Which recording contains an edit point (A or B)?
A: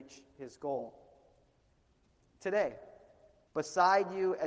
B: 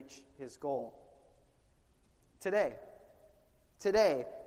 A